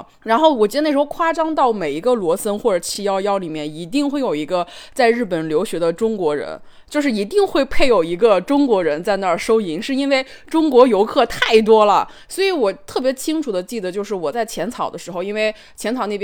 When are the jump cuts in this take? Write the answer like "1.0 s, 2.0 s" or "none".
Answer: none